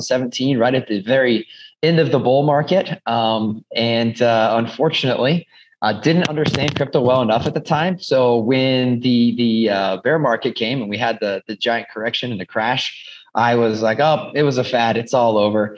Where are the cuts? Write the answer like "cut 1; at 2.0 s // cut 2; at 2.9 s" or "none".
none